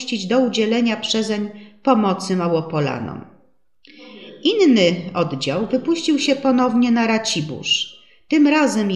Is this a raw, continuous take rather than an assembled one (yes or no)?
yes